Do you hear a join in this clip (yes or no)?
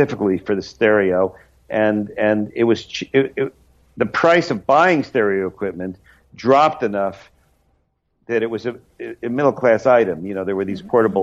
no